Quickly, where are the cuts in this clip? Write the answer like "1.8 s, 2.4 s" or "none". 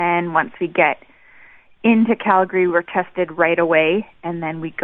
none

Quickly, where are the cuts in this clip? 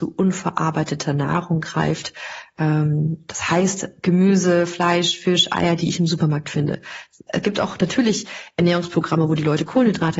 none

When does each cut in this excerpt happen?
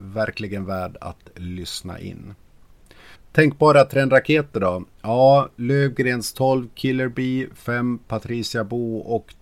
3.1 s

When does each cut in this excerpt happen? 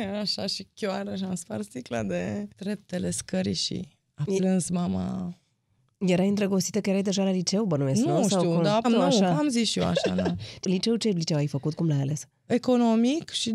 2.5 s, 8.8 s, 10.6 s

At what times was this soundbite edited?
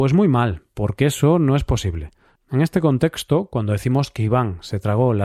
2.4 s

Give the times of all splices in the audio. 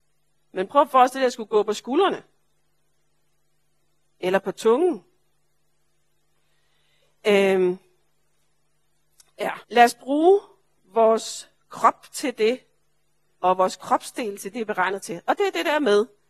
9.6 s, 14.5 s

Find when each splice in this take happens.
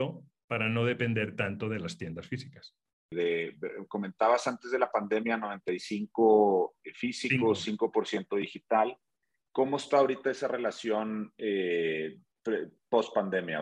3.1 s

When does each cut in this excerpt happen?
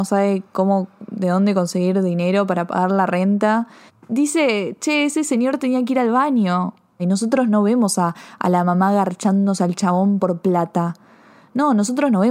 3.9 s, 7.0 s

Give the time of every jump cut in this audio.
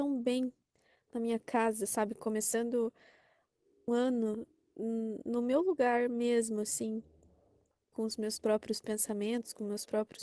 3.9 s, 7.9 s

